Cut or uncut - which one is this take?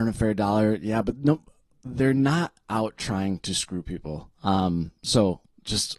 uncut